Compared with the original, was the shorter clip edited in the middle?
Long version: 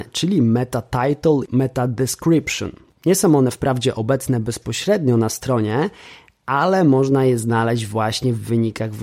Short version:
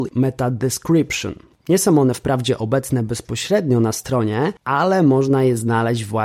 yes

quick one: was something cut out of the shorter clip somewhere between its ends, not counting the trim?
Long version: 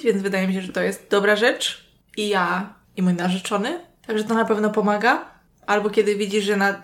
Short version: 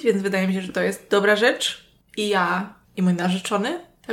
no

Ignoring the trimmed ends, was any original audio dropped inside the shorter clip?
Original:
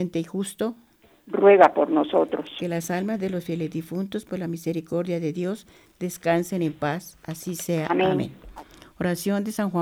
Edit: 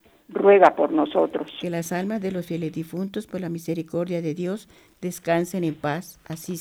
no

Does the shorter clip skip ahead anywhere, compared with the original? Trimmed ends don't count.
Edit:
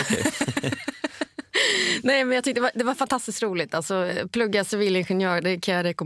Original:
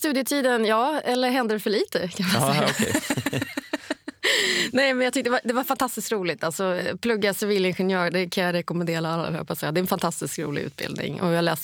no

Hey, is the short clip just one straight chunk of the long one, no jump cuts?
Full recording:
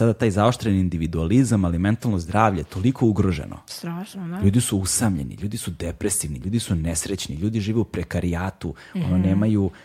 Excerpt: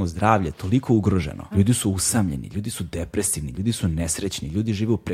no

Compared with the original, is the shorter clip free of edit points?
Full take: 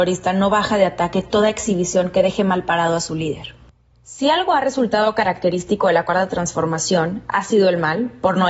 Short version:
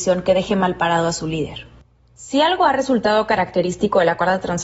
yes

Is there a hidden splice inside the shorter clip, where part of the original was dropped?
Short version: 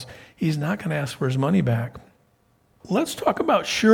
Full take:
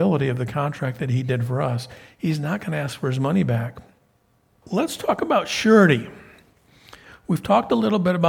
no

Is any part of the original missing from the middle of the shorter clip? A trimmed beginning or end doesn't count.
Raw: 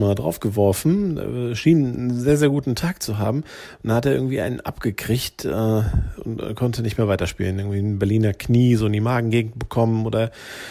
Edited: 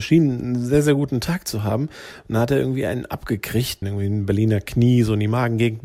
yes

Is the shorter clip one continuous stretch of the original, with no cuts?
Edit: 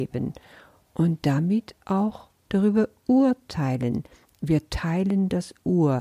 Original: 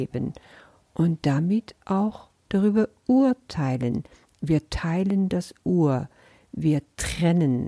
yes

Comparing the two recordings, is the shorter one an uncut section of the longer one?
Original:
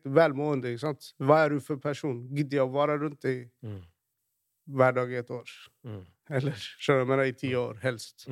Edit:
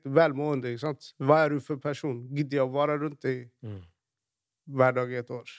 yes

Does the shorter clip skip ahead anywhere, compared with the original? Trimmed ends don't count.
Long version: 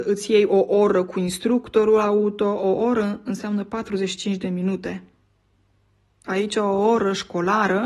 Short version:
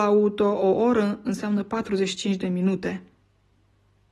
no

